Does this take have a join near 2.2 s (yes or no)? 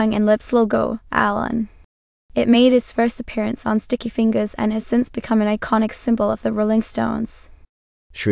no